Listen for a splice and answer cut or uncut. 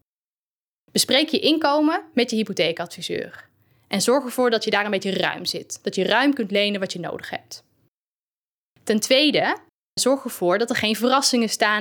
uncut